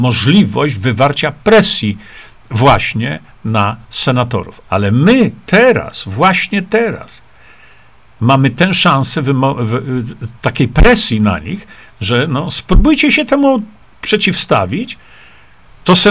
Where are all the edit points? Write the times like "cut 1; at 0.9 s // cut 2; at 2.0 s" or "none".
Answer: cut 1; at 4.6 s